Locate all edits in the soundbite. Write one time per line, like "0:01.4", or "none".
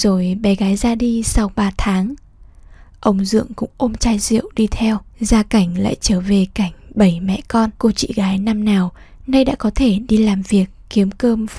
0:05.1
0:07.7